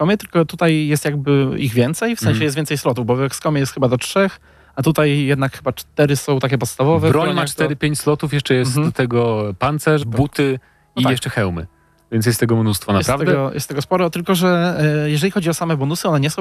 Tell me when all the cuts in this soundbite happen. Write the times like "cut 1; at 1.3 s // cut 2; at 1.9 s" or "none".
cut 1; at 10.0 s